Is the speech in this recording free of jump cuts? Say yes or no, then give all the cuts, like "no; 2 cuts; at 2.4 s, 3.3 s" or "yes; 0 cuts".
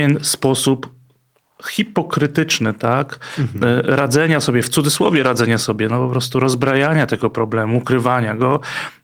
yes; 0 cuts